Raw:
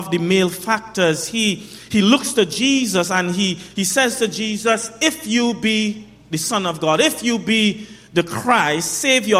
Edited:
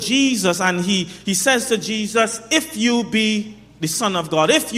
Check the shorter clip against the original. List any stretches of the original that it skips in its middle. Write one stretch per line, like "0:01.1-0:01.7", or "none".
none